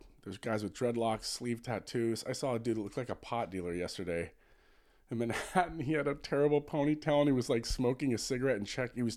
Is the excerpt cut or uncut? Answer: uncut